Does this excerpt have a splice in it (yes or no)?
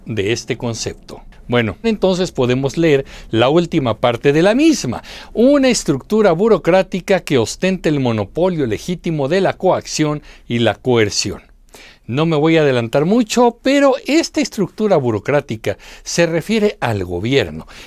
yes